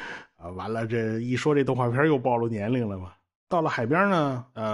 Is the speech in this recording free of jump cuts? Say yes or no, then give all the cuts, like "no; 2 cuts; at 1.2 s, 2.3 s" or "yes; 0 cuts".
no; 1 cut; at 3.5 s